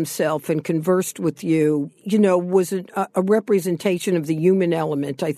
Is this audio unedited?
yes; 0 cuts

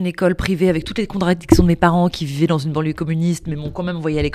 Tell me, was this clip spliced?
no; 0 cuts

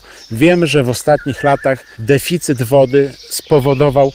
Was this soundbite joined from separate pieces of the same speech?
no; 0 cuts

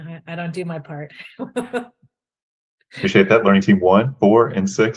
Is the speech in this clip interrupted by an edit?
no; 0 cuts

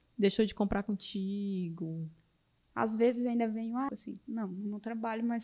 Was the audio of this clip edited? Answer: yes; 2 cuts; at 2.7 s, 3.9 s

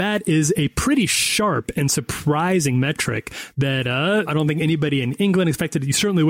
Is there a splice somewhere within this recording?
yes; 1 cut; at 4.3 s

